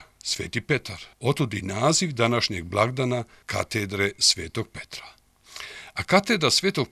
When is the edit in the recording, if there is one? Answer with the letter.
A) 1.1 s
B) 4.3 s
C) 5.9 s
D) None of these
A